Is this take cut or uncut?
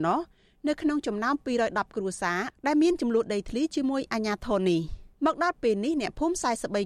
cut